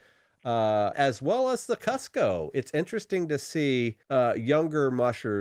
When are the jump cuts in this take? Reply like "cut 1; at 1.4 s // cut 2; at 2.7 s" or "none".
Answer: cut 1; at 0.9 s // cut 2; at 4.0 s